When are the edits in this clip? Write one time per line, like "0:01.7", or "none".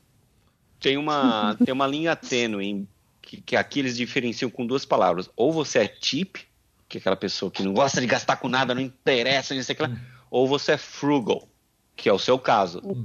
none